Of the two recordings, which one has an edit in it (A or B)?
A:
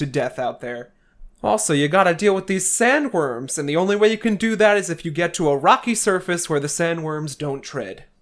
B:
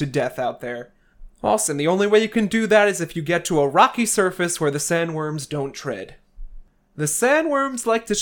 B